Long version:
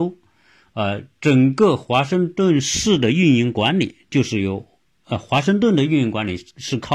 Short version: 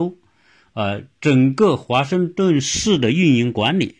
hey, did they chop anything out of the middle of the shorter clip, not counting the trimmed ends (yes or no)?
no